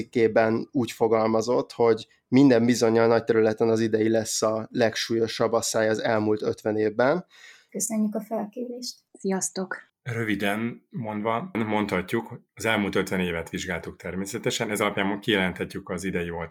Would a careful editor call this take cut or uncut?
cut